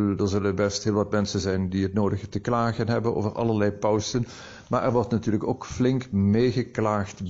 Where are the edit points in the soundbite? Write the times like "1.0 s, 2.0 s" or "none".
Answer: none